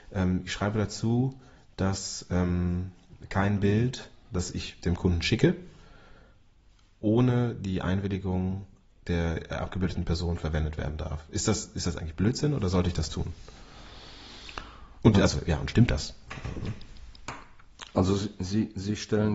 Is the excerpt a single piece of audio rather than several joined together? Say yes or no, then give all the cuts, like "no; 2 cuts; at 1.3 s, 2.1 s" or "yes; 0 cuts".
yes; 0 cuts